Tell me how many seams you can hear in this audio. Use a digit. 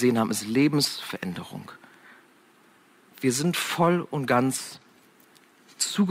1